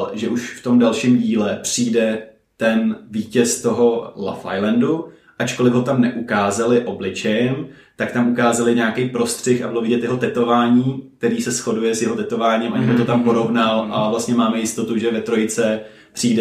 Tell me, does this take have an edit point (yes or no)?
no